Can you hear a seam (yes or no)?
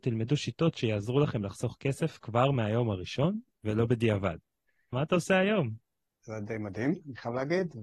yes